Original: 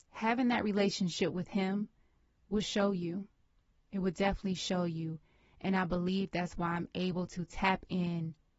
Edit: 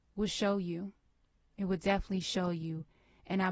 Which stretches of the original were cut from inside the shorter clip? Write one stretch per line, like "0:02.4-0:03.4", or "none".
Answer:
none